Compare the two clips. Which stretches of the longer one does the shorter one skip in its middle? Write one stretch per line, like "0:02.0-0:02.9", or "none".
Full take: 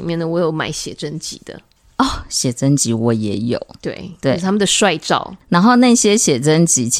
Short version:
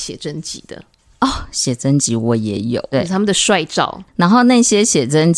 0:03.7-0:04.2